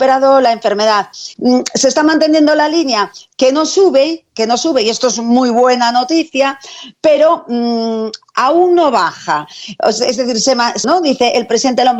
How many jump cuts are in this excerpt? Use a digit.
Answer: 2